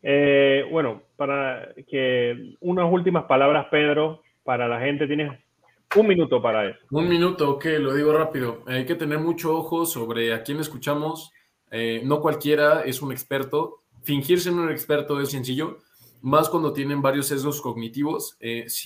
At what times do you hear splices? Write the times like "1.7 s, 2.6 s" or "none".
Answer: 15.3 s

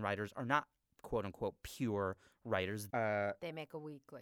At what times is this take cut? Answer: 2.9 s

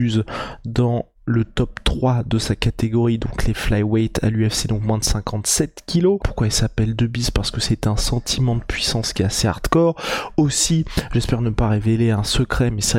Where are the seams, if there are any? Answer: 6.2 s

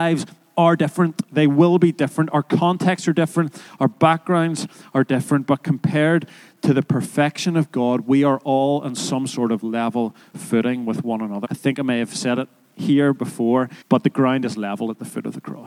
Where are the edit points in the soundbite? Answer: 11.4 s, 13.8 s

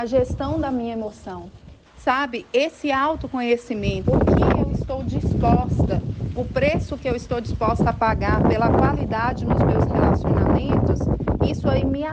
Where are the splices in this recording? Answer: 1.9 s, 4.0 s

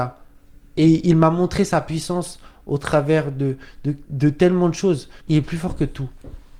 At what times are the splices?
5.3 s

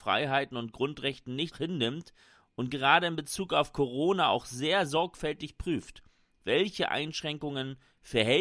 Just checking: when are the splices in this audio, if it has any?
1.5 s

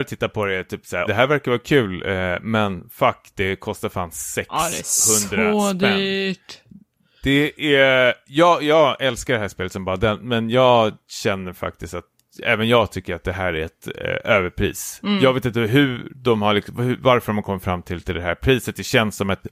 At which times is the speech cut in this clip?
1.1 s

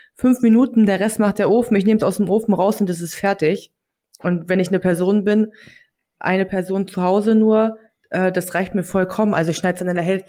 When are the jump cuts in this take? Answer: none

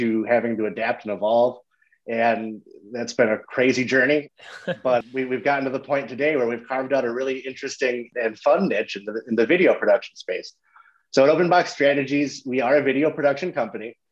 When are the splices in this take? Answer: none

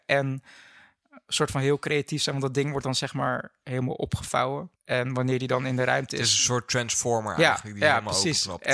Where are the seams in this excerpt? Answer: 4.8 s

